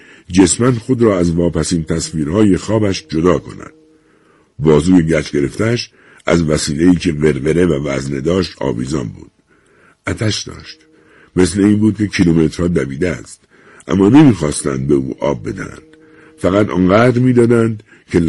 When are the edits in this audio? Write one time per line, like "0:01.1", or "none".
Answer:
none